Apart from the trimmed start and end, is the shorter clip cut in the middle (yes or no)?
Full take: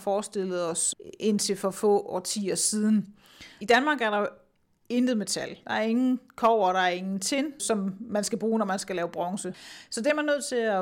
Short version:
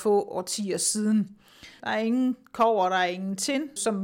yes